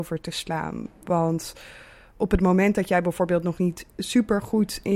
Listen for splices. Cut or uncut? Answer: uncut